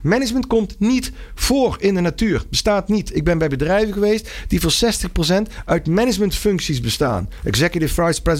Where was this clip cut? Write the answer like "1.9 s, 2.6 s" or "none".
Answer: none